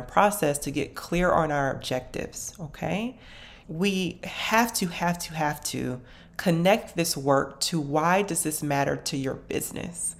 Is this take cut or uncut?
cut